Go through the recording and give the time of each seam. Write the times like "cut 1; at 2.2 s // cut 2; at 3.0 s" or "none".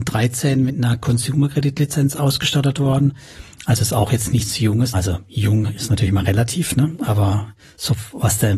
cut 1; at 4.9 s